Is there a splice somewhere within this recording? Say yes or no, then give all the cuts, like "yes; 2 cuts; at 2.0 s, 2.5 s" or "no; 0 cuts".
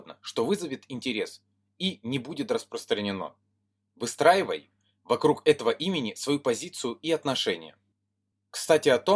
no; 0 cuts